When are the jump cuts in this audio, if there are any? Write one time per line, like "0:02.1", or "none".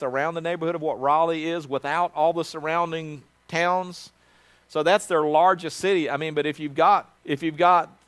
0:07.2